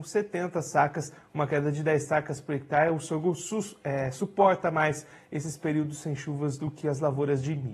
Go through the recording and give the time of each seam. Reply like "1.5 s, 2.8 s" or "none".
none